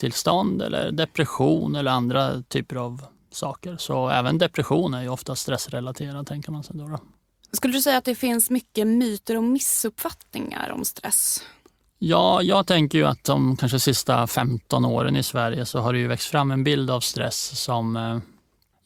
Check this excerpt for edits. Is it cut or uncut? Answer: uncut